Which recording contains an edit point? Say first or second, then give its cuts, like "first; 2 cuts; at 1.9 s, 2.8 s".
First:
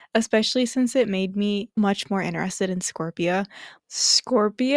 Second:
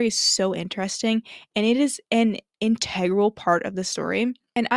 first; 2 cuts; at 1.8 s, 3.8 s